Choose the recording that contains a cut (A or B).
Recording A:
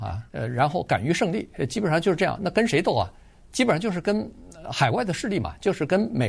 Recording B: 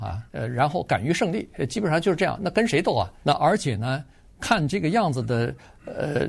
B